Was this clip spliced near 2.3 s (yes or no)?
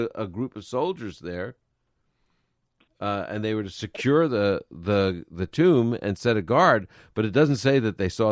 no